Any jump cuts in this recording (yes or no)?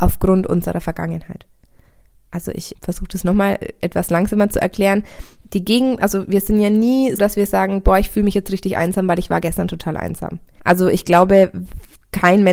yes